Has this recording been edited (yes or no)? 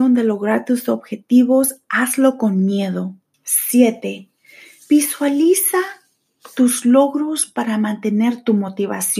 yes